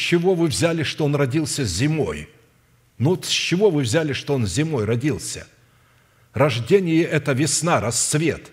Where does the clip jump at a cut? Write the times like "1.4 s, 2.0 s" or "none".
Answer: none